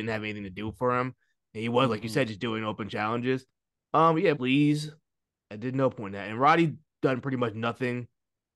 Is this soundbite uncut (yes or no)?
no